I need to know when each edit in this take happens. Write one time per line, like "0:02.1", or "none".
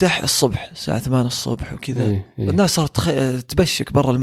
none